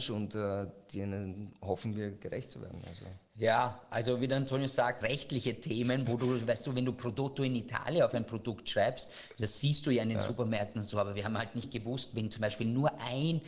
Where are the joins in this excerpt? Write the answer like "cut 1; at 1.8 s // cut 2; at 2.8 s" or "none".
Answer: cut 1; at 5.0 s